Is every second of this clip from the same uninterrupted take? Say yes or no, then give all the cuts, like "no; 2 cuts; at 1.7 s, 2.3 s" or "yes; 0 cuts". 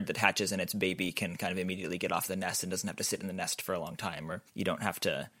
no; 1 cut; at 4.5 s